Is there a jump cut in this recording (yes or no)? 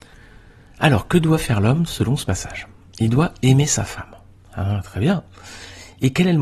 yes